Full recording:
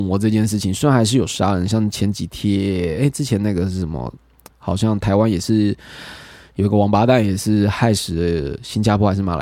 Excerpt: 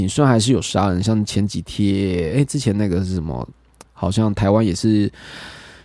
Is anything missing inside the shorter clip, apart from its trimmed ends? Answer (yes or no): no